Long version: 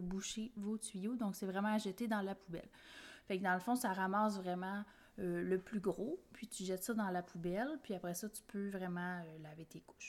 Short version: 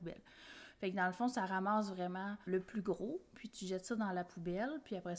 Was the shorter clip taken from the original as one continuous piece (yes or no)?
no